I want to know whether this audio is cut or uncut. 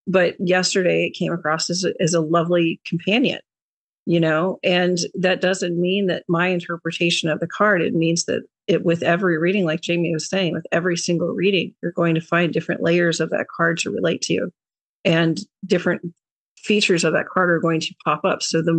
uncut